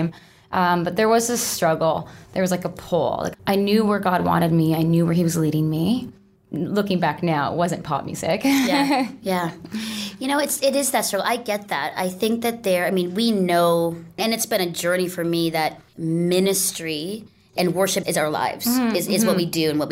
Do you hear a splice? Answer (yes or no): yes